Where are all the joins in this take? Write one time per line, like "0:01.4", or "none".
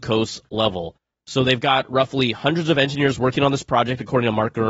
none